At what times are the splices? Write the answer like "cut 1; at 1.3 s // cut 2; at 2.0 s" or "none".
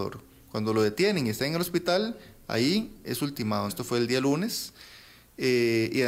cut 1; at 3.7 s

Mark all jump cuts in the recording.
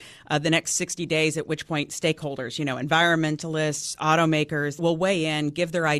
cut 1; at 4.8 s

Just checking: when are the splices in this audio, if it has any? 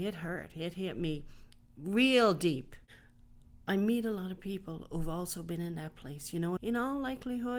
cut 1; at 6.6 s

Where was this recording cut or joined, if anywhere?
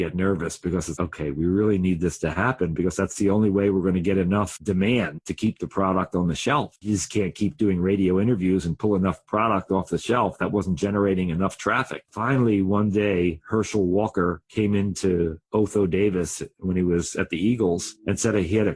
cut 1; at 1.0 s

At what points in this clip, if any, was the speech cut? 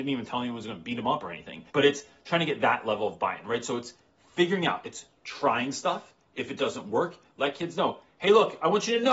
cut 1; at 1.7 s

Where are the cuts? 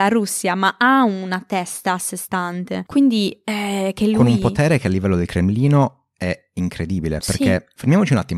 none

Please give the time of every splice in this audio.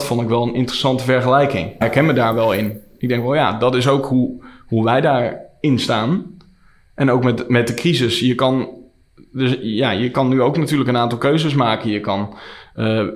cut 1; at 1.8 s

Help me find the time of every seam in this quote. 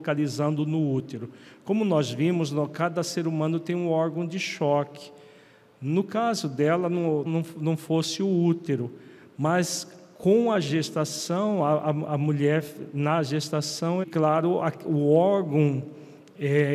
cut 1; at 7.3 s // cut 2; at 14.0 s

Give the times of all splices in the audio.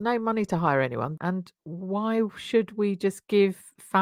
cut 1; at 1.2 s

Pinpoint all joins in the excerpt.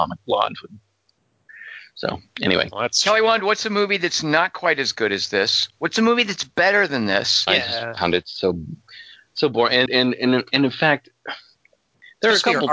cut 1; at 7.5 s // cut 2; at 9.9 s

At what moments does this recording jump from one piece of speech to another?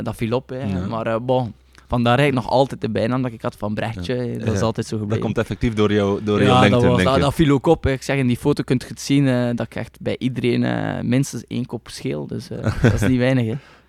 cut 1; at 4.4 s

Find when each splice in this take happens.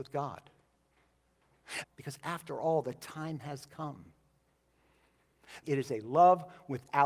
cut 1; at 1.8 s // cut 2; at 5.6 s

